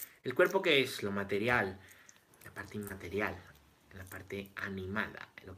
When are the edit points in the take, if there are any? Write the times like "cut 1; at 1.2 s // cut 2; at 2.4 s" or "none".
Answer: cut 1; at 2.3 s

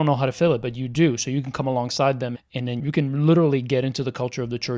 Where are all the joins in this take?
cut 1; at 2.3 s

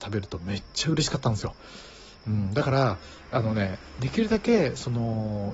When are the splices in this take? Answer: none

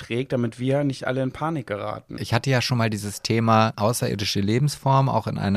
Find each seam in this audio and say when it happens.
cut 1; at 2.2 s // cut 2; at 3.7 s

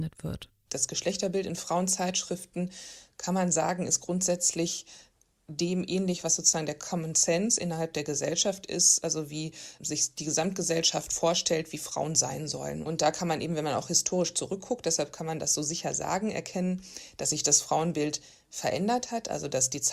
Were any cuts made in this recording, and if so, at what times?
none

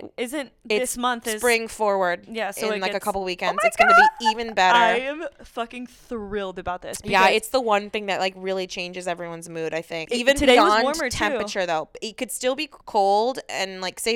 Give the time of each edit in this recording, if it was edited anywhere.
cut 1; at 10.1 s // cut 2; at 12.8 s

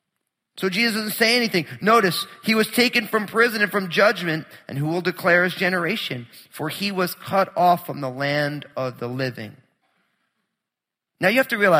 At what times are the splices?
none

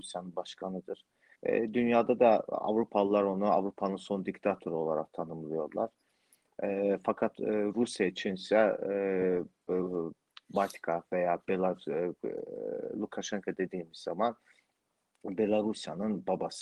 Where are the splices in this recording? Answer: cut 1; at 1.4 s

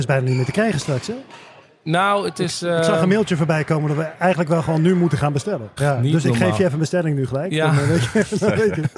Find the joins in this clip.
cut 1; at 5.8 s

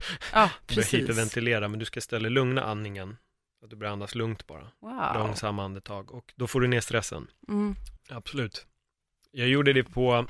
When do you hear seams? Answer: cut 1; at 8.0 s

